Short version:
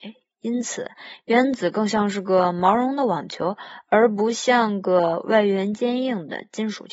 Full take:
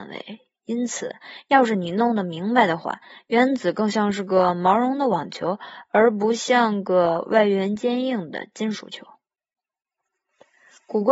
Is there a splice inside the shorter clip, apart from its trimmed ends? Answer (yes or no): yes